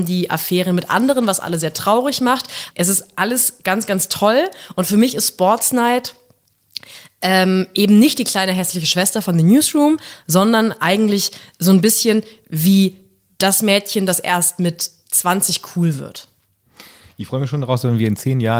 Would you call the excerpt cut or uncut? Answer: cut